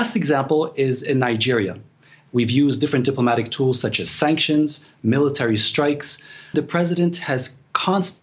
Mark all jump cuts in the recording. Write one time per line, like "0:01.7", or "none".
0:02.3
0:06.5